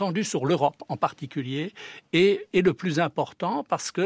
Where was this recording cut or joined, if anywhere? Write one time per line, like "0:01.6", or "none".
none